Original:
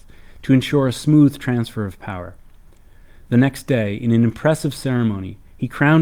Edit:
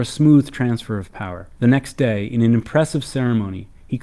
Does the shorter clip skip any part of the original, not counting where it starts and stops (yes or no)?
yes